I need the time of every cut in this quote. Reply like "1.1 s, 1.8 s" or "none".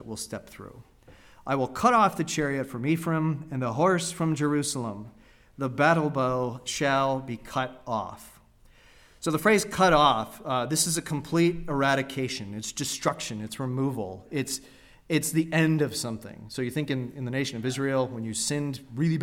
none